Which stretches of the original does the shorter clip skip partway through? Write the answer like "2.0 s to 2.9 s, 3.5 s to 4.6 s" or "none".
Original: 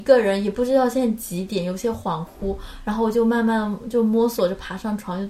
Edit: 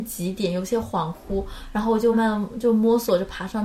3.2 s to 3.4 s